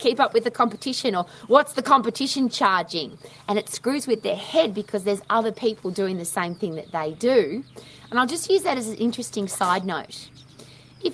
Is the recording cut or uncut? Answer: uncut